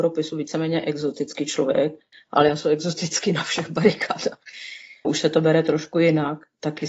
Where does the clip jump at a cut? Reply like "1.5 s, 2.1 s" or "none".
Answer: 5.0 s